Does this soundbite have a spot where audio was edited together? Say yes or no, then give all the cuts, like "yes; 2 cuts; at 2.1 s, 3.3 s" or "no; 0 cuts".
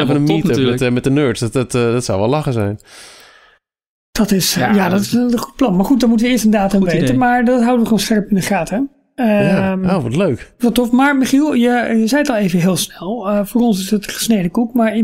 no; 0 cuts